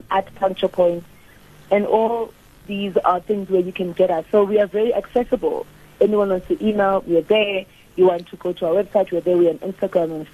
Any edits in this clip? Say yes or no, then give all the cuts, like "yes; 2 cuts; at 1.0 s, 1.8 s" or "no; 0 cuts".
no; 0 cuts